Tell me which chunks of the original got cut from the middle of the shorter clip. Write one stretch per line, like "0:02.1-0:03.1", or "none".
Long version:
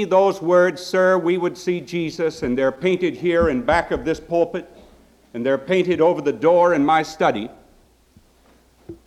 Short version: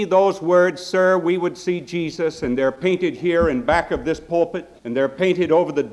0:04.8-0:05.3